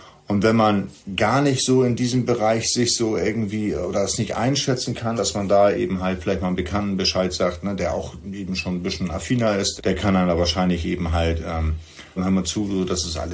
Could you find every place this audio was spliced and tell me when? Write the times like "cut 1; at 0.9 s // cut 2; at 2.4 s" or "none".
cut 1; at 5.2 s // cut 2; at 9.8 s // cut 3; at 12.2 s